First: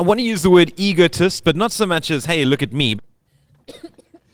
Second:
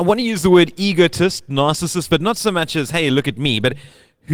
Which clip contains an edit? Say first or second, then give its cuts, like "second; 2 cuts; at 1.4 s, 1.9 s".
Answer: first; 2 cuts; at 1.4 s, 3.0 s